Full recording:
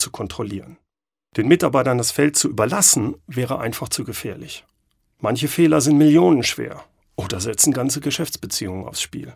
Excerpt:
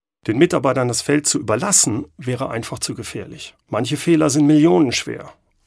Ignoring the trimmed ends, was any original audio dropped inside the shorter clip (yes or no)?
yes